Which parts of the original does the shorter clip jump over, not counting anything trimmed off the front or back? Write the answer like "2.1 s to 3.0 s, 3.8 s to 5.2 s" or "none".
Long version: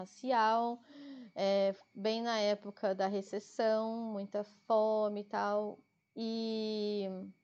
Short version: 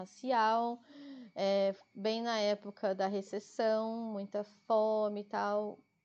none